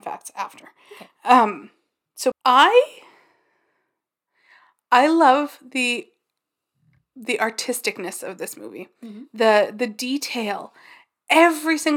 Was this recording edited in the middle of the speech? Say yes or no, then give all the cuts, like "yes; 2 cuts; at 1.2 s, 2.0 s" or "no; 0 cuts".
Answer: yes; 1 cut; at 2.3 s